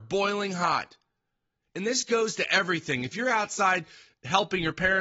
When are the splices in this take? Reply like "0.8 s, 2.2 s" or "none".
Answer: none